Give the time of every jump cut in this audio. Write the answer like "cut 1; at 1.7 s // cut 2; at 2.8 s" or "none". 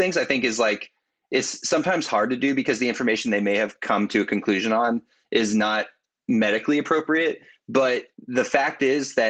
none